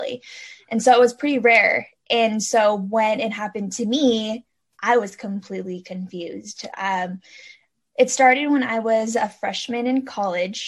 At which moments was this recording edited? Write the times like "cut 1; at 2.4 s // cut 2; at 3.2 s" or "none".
none